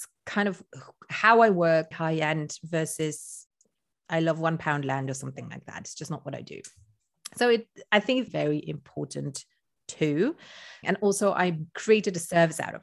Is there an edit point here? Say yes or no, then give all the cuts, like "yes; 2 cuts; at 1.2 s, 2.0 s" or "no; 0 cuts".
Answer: yes; 3 cuts; at 1.9 s, 8.3 s, 10.8 s